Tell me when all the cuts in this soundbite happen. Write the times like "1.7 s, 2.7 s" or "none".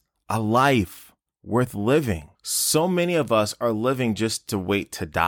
2.3 s